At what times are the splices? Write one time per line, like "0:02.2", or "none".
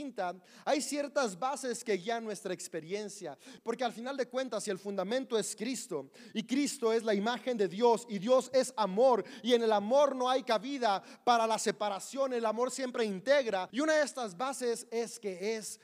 0:03.6
0:13.7